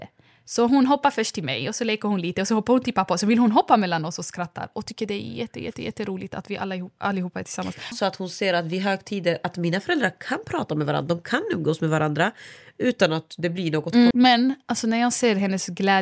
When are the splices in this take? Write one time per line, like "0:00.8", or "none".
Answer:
0:07.9
0:14.1